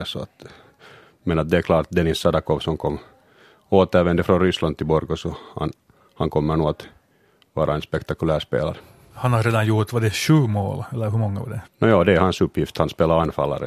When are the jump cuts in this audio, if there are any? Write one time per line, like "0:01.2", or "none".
0:11.6